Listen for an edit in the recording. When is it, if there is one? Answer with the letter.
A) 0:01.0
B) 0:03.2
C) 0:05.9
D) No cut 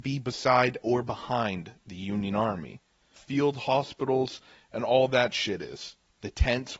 B